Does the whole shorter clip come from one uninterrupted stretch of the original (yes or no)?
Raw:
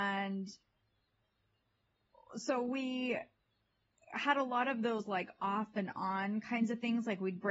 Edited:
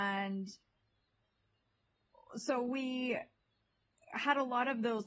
yes